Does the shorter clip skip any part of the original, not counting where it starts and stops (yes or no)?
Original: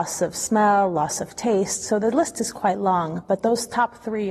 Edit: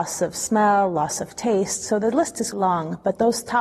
yes